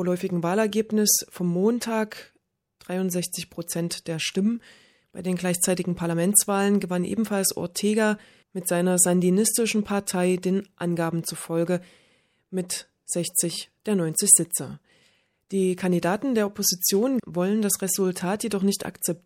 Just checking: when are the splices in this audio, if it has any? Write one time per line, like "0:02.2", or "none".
0:17.2